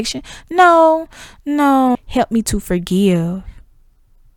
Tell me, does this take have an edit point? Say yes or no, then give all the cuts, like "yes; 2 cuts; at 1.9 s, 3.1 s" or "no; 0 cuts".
yes; 1 cut; at 1.9 s